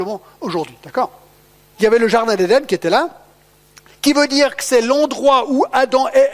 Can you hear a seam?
yes; 1 cut; at 1.7 s

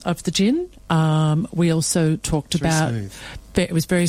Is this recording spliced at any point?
no; 0 cuts

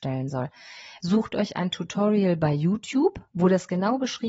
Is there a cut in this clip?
yes; 1 cut; at 1.0 s

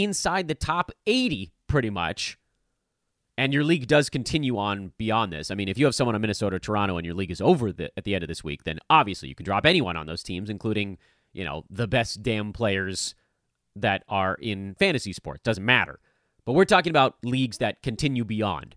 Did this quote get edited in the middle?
no; 0 cuts

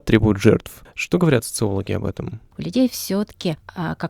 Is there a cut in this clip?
yes; 1 cut; at 2.5 s

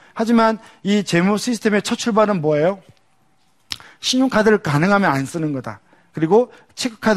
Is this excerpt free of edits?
yes; 0 cuts

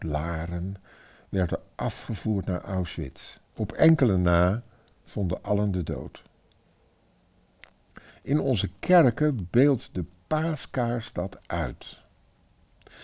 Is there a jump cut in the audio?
yes; 2 cuts; at 3.4 s, 8.1 s

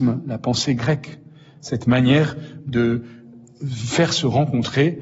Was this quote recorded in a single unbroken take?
yes; 0 cuts

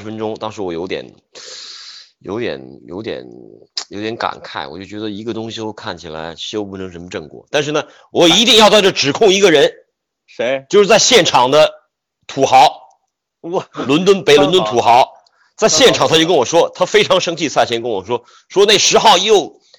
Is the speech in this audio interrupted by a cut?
no; 0 cuts

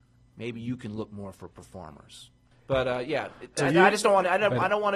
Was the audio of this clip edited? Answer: yes; 2 cuts; at 2.5 s, 3.6 s

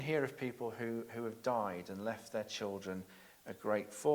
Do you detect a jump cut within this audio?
no; 0 cuts

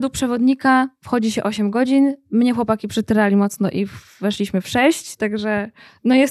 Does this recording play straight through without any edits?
yes; 0 cuts

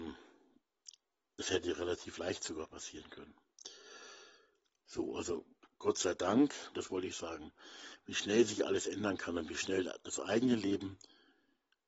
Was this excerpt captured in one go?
no; 2 cuts; at 4.8 s, 6.7 s

